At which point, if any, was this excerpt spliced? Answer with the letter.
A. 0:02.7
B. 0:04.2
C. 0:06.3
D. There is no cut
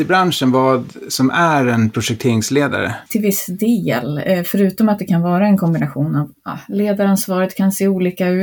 C